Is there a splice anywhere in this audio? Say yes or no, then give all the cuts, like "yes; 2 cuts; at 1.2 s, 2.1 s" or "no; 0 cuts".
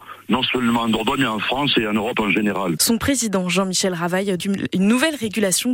yes; 2 cuts; at 2.8 s, 4.4 s